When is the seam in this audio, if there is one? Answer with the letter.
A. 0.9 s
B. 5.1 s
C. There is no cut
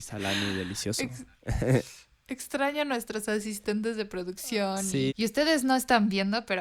B